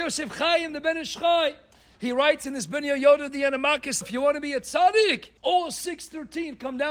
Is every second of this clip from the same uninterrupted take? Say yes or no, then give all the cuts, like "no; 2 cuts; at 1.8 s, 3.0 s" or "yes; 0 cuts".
no; 2 cuts; at 4.0 s, 5.4 s